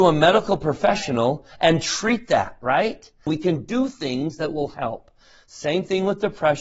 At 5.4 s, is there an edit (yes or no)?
no